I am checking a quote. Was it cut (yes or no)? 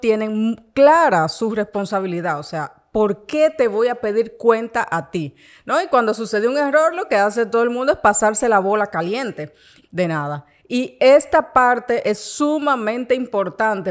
yes